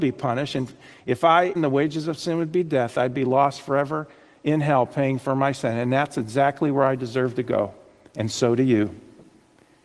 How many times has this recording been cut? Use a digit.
1